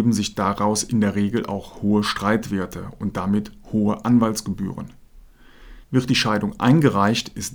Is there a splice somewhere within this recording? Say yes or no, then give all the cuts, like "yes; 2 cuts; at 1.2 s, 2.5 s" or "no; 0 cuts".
yes; 1 cut; at 5.8 s